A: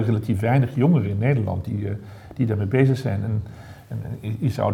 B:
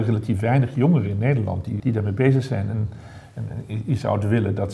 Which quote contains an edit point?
B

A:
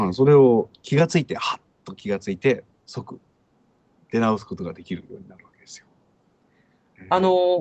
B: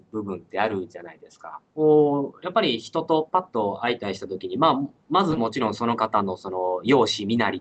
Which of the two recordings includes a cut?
B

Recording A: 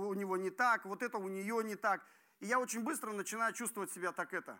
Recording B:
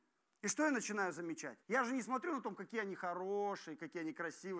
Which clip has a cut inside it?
B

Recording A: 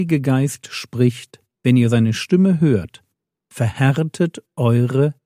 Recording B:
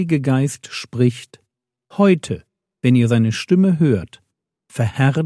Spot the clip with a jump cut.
A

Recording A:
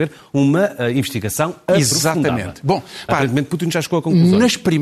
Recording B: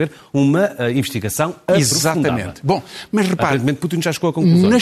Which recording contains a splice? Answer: A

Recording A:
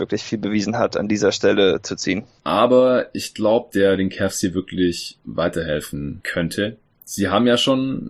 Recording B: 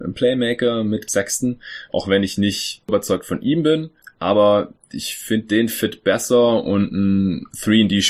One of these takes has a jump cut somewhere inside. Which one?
A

